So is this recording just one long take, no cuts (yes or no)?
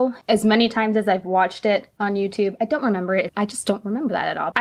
no